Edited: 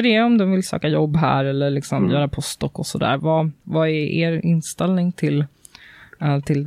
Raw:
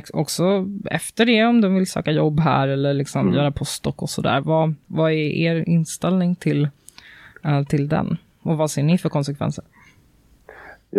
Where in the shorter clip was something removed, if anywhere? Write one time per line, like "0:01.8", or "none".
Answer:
none

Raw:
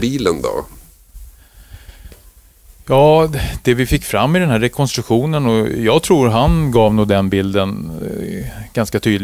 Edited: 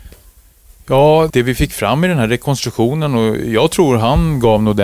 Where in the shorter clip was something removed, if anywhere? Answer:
0:01.3

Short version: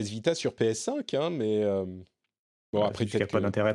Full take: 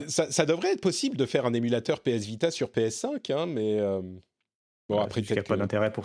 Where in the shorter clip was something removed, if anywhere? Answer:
none

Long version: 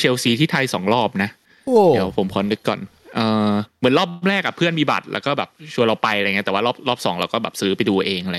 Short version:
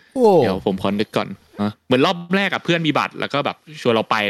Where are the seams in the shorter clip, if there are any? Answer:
0:01.6

